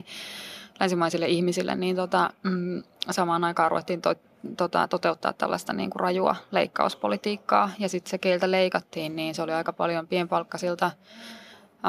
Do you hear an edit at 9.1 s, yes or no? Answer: no